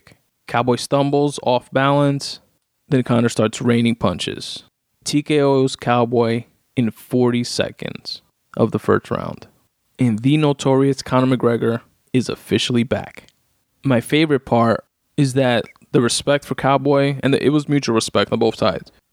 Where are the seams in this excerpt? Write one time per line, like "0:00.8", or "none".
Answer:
none